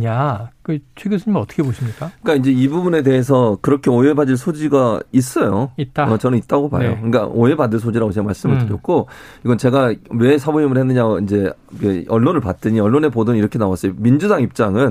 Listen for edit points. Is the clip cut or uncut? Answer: uncut